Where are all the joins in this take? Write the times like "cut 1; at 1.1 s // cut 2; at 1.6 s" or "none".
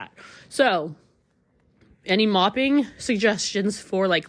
none

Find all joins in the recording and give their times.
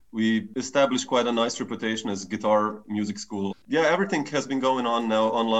cut 1; at 3.5 s

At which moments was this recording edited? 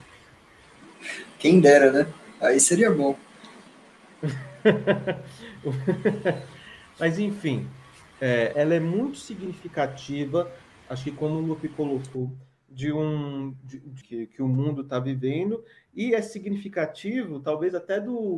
cut 1; at 8.5 s // cut 2; at 14.0 s

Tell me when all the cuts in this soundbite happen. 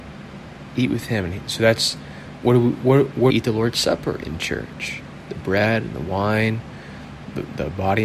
cut 1; at 3.3 s

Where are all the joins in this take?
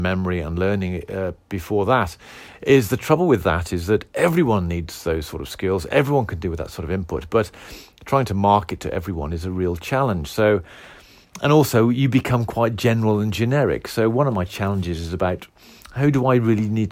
none

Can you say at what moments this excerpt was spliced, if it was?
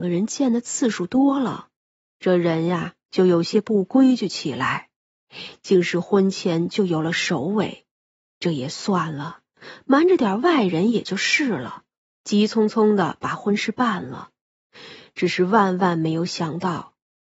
none

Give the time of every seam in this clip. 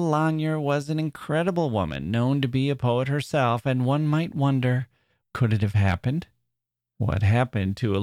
cut 1; at 5.2 s

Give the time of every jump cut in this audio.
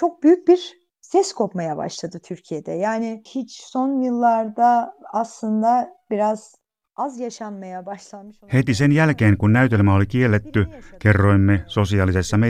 none

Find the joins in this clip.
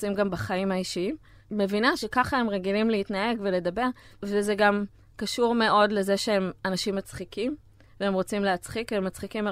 none

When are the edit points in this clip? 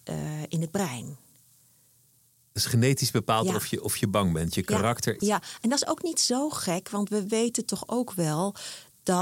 cut 1; at 5.2 s

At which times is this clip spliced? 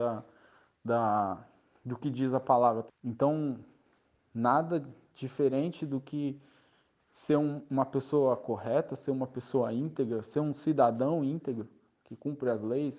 cut 1; at 2.9 s

